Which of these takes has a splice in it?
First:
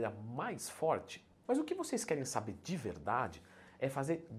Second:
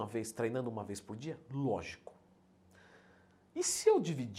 first; 1 cut; at 1.4 s

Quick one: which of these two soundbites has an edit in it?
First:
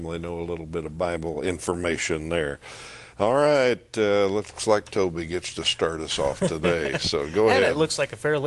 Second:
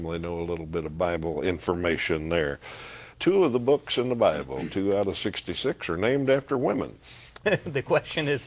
second; 2 cuts; at 3.1 s, 7.4 s

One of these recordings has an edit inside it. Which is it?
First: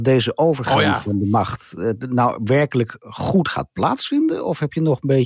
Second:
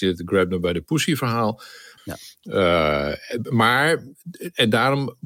second; 1 cut; at 2.0 s

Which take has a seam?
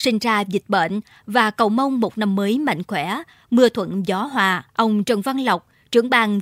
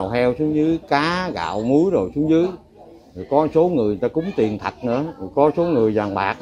first; 1 cut; at 4.7 s

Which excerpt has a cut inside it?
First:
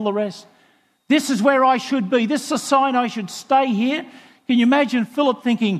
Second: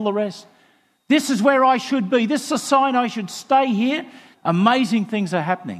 second; 1 cut; at 4.3 s

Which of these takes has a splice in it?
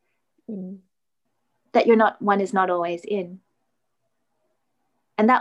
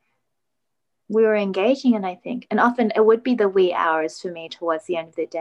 second; 1 cut; at 0.9 s

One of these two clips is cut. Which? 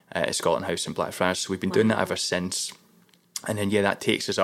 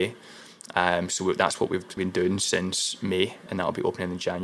second; 2 cuts; at 2.0 s, 3.5 s

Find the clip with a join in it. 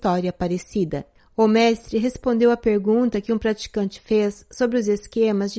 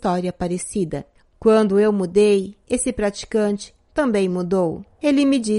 second; 1 cut; at 1.2 s

